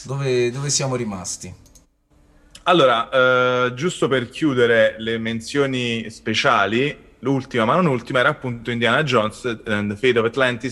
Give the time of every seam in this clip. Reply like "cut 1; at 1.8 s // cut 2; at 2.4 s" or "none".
none